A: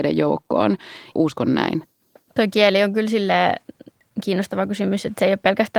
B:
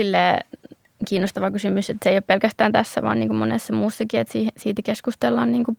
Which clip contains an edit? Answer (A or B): A